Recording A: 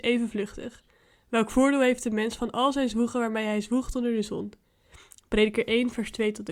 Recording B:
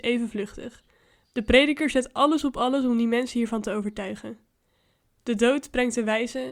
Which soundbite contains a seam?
B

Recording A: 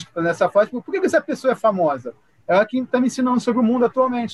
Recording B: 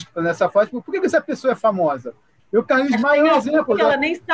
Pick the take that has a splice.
B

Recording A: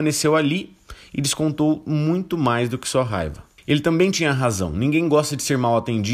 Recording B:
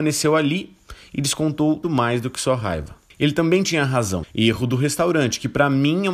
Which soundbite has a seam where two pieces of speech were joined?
B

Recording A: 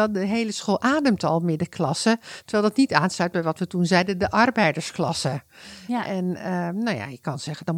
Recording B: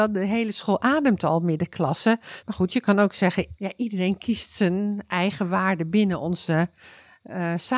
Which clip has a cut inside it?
B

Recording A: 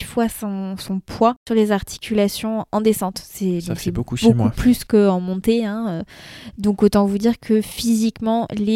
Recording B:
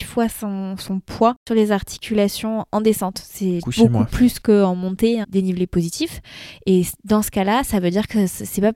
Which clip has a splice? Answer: B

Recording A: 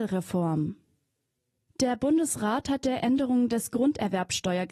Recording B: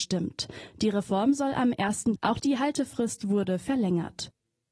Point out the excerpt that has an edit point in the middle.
B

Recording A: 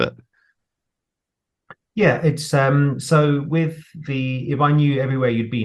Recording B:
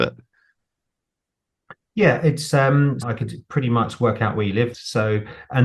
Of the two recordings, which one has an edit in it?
B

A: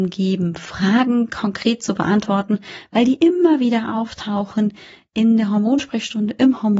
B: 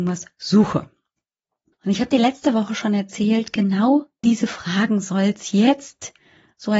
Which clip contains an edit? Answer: B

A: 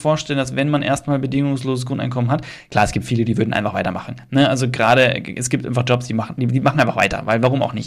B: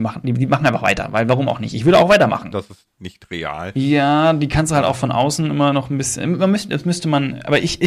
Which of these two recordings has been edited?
B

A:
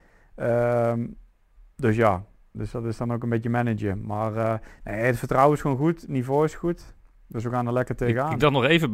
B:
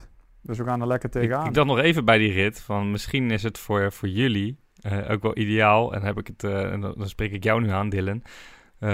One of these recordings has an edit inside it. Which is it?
A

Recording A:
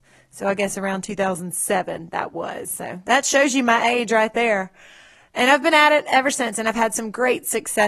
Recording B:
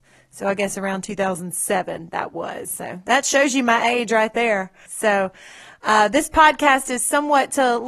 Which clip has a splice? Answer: B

